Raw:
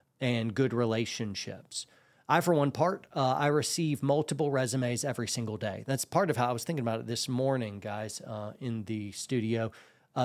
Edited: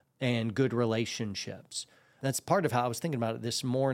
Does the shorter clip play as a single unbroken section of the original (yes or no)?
no